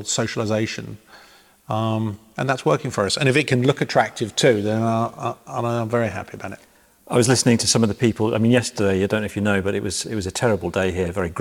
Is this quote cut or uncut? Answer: uncut